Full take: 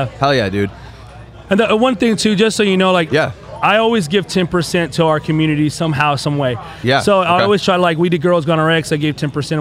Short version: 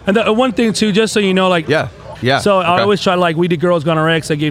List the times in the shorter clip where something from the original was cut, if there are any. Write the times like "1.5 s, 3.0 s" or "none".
2.2 s

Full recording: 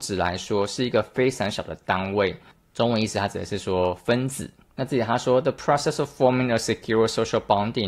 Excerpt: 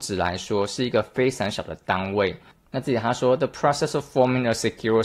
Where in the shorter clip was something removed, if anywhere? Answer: 2.6 s

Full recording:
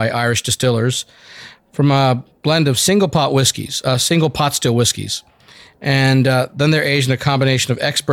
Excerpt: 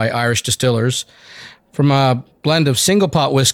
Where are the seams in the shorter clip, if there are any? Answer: none

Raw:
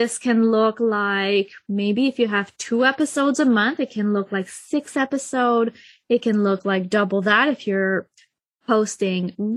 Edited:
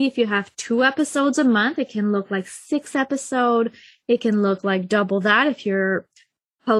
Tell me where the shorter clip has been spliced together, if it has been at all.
none

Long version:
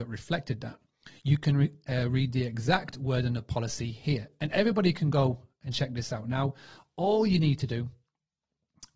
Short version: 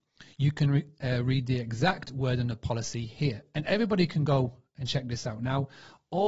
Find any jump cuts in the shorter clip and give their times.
none

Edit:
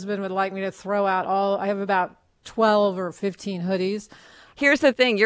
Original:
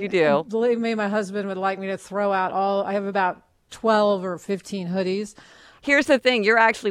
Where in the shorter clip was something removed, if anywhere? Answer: none

